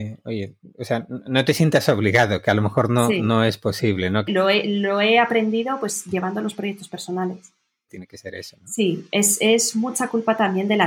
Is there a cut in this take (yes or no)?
yes